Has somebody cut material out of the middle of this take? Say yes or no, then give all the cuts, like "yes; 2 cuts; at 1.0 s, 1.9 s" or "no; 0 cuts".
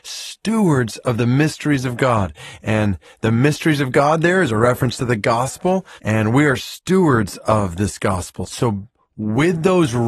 yes; 2 cuts; at 6.0 s, 8.5 s